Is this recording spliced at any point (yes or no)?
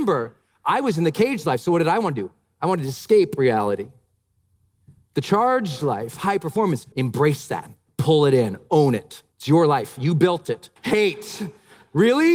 yes